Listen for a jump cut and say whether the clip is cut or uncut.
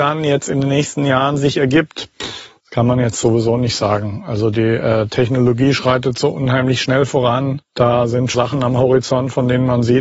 cut